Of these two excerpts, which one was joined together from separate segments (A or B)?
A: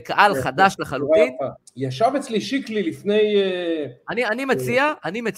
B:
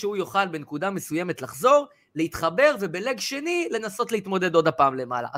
A